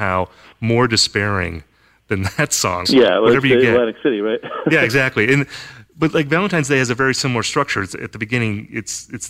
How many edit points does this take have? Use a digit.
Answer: 1